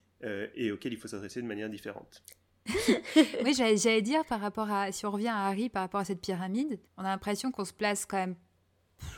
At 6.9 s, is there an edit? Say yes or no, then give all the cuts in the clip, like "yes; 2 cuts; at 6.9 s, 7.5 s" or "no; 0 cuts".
yes; 2 cuts; at 2.7 s, 6.9 s